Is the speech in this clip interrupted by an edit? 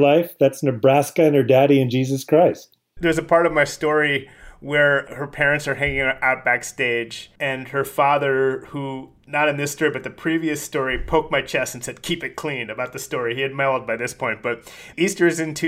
yes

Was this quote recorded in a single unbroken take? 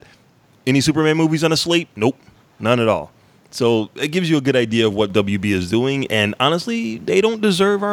yes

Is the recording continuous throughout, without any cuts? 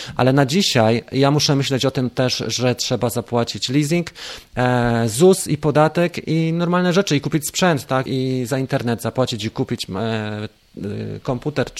no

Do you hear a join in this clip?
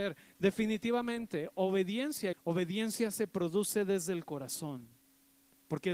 yes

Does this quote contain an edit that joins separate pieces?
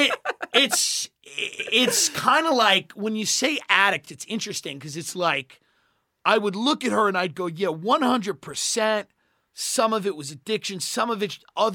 no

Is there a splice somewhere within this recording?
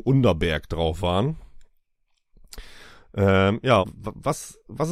yes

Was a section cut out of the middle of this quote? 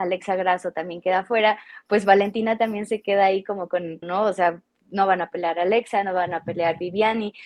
yes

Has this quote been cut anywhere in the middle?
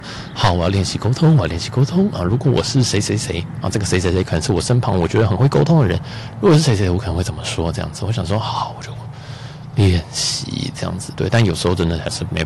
no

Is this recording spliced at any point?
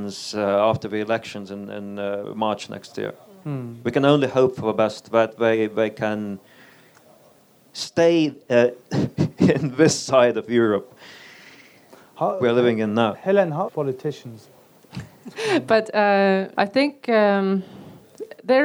yes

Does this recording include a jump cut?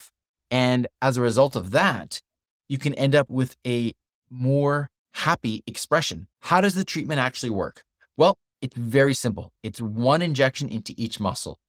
yes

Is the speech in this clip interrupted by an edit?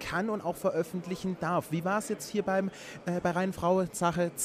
no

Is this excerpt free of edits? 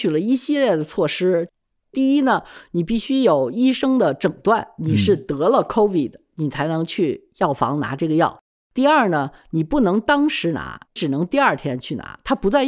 no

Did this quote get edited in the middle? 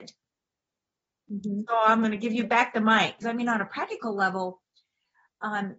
yes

